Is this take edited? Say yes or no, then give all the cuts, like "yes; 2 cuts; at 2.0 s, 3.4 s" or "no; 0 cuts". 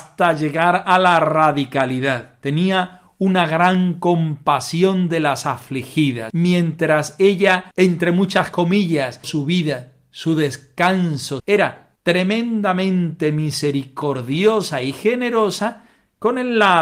yes; 3 cuts; at 6.3 s, 9.2 s, 11.4 s